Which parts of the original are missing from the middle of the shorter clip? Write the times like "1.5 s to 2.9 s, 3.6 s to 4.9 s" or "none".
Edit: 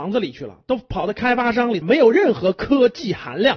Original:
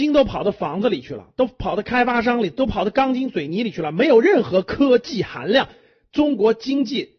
2.5 s to 3.9 s